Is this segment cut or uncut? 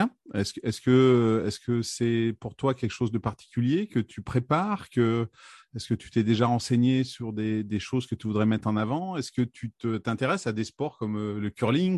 uncut